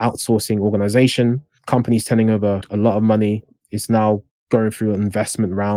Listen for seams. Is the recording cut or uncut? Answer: uncut